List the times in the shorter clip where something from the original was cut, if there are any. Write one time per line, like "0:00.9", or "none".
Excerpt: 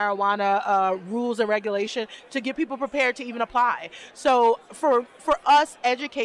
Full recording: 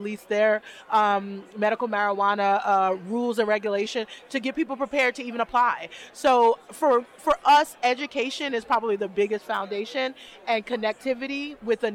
none